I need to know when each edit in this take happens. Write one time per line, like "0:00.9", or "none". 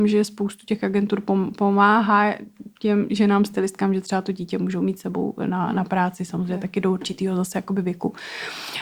none